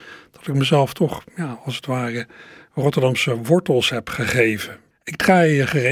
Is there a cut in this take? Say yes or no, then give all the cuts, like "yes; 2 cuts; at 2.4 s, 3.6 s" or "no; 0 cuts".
yes; 1 cut; at 4.9 s